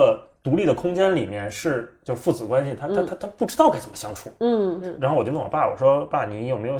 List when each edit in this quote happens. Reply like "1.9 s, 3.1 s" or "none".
none